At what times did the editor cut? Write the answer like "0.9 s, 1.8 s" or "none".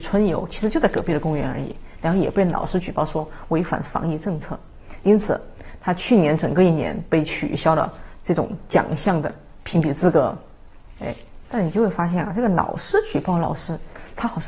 none